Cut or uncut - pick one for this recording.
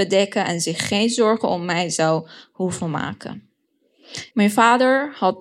cut